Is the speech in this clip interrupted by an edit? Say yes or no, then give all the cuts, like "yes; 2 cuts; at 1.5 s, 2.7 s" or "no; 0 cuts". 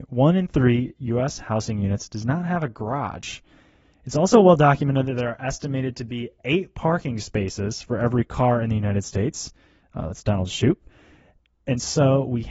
no; 0 cuts